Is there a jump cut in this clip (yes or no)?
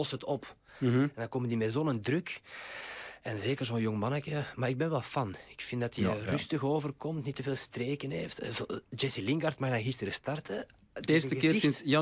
no